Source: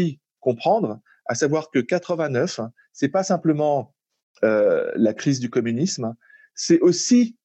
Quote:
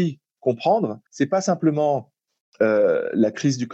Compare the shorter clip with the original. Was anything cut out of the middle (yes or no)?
yes